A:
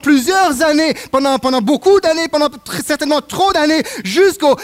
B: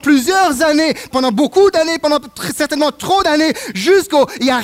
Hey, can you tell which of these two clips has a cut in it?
B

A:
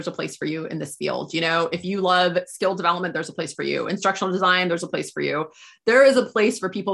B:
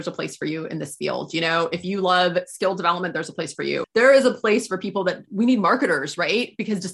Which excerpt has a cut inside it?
B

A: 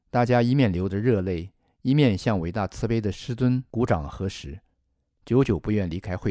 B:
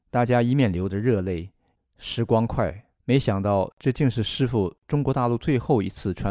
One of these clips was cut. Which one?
B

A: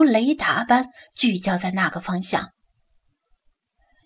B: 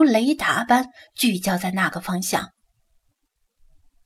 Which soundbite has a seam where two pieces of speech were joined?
B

